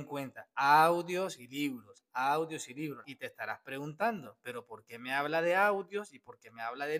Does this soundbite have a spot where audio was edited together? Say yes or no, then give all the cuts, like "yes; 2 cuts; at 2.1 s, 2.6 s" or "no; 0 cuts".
yes; 1 cut; at 3.0 s